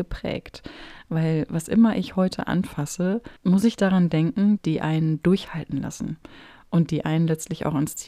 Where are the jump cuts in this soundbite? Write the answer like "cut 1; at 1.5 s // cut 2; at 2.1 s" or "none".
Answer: cut 1; at 3.4 s // cut 2; at 4.6 s